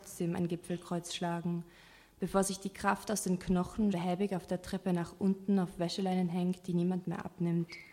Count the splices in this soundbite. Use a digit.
1